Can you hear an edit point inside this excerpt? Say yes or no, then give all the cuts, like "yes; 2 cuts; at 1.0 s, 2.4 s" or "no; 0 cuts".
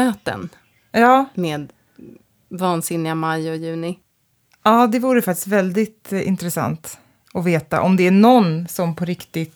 no; 0 cuts